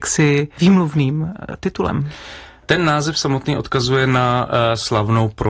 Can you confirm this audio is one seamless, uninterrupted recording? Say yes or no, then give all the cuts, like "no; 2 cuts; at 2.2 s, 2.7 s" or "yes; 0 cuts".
yes; 0 cuts